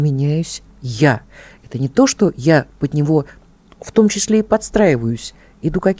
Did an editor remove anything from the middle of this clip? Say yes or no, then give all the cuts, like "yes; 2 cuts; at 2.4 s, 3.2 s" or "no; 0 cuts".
no; 0 cuts